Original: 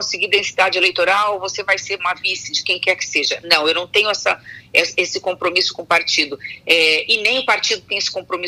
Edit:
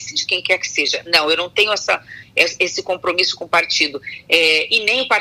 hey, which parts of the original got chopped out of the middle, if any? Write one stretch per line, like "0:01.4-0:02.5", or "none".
none